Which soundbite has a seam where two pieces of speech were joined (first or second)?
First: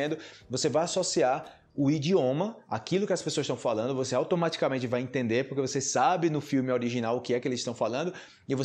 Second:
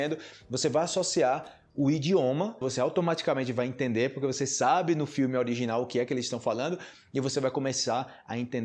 second